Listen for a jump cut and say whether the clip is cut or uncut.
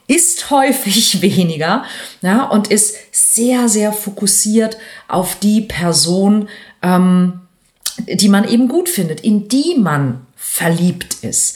cut